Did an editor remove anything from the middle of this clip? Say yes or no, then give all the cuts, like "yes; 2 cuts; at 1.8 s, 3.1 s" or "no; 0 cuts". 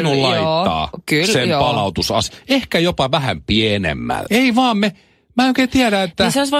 yes; 1 cut; at 4.3 s